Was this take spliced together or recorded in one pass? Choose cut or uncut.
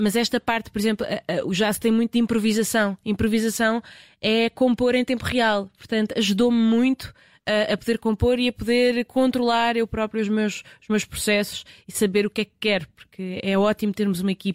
uncut